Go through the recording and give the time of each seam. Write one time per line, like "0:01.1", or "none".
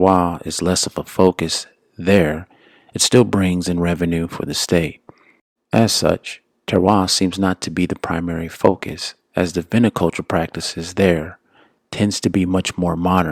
0:05.6